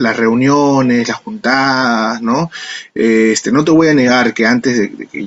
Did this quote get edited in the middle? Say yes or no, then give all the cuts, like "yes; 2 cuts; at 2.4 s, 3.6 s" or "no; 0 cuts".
no; 0 cuts